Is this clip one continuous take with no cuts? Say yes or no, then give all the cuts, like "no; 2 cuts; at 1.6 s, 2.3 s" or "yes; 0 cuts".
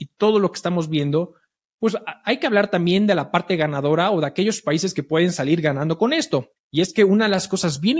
no; 1 cut; at 6.6 s